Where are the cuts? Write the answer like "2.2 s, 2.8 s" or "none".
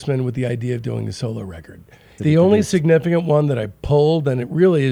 2.2 s